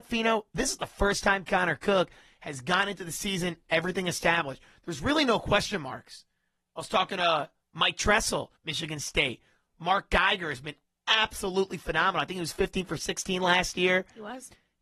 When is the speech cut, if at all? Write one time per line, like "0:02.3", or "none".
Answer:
0:08.6